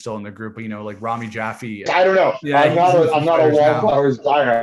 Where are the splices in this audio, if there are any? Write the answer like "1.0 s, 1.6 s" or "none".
1.9 s